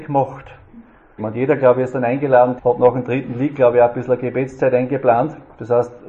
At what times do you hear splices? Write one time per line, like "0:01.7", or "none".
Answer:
0:01.2
0:02.6